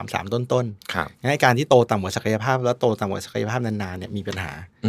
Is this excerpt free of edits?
yes; 0 cuts

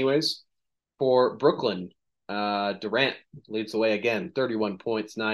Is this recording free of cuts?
yes; 0 cuts

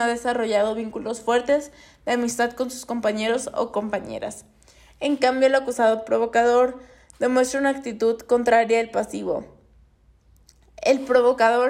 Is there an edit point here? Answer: no; 0 cuts

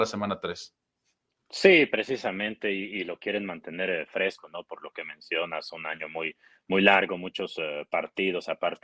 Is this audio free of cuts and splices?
yes; 0 cuts

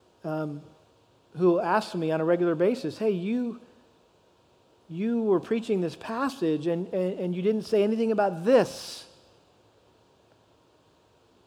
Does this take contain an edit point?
no; 0 cuts

